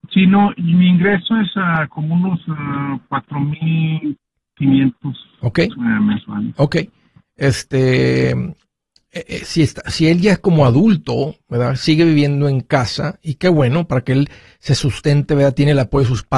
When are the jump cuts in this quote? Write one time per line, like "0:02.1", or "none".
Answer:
none